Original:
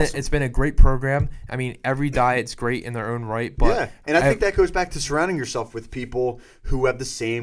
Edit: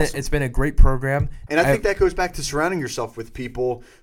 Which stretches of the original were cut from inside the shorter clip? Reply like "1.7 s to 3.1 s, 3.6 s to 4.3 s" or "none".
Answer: 1.5 s to 4.0 s